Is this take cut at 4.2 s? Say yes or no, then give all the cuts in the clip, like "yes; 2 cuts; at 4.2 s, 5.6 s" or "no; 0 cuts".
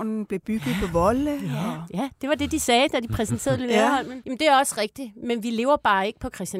yes; 1 cut; at 4.2 s